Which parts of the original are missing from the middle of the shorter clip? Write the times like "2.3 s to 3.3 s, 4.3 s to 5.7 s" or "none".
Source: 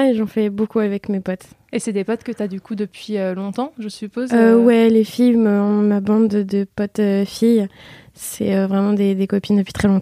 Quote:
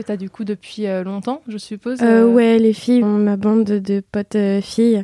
5.3 s to 5.7 s